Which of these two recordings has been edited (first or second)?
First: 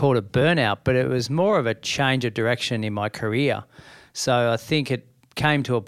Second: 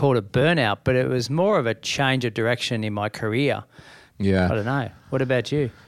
second